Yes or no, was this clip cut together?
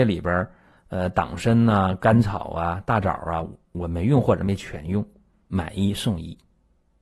yes